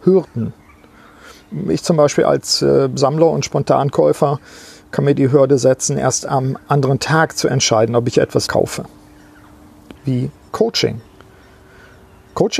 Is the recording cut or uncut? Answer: cut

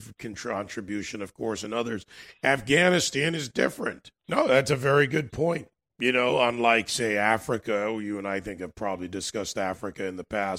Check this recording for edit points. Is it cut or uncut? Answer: cut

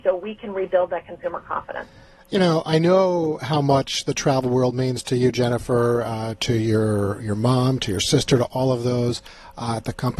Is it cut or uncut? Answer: uncut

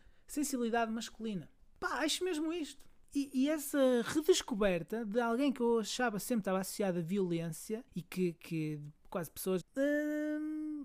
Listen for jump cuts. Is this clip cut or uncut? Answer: cut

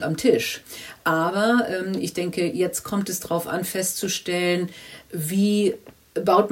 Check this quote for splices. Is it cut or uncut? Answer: uncut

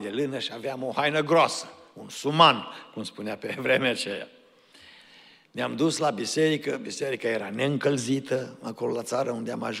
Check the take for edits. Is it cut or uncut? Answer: uncut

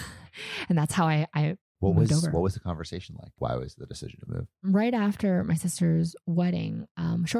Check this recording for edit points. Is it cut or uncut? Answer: uncut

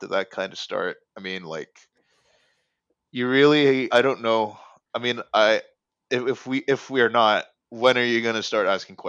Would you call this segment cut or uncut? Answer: cut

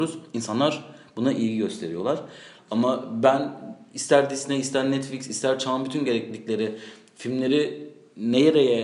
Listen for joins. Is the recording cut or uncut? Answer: cut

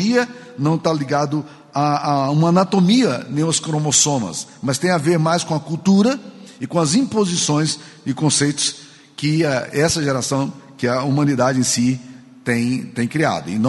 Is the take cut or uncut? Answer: uncut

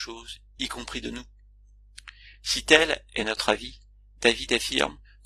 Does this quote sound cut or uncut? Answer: uncut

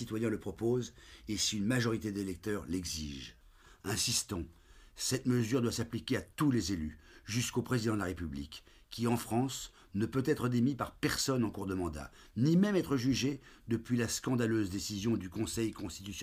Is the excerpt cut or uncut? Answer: uncut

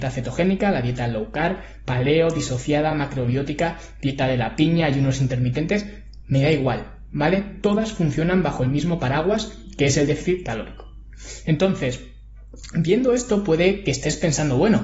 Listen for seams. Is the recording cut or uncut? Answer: uncut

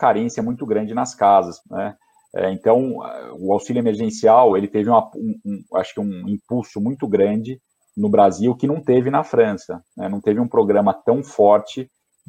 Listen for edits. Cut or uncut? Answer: cut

